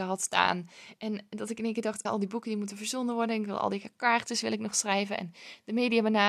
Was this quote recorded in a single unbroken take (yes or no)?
no